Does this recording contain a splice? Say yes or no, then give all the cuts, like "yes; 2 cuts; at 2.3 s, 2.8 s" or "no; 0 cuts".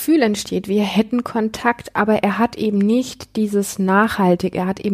no; 0 cuts